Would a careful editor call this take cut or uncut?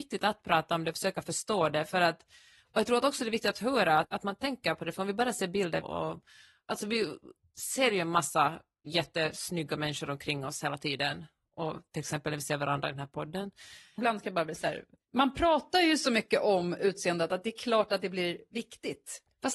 cut